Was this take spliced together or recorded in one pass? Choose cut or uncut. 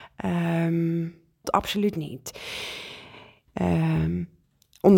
cut